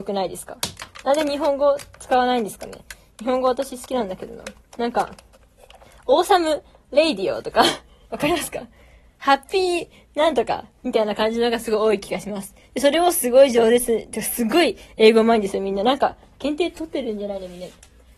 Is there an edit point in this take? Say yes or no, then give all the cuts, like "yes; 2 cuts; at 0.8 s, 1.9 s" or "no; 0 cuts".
no; 0 cuts